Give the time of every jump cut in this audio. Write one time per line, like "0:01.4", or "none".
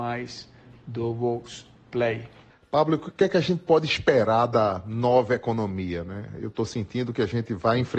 none